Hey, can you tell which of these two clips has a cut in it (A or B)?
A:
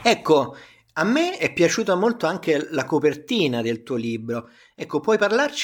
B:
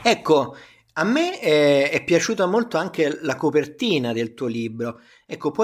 A